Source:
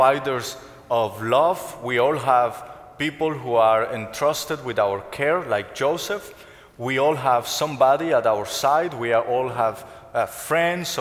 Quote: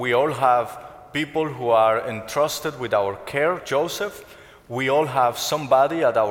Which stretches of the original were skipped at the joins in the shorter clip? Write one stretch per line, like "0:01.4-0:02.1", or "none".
0:05.4-0:05.7